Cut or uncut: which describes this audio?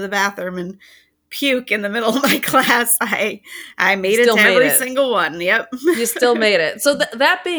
uncut